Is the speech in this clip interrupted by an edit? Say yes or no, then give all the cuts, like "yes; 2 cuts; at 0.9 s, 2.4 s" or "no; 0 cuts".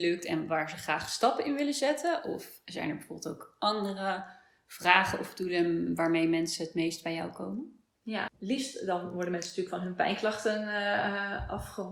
yes; 1 cut; at 8.3 s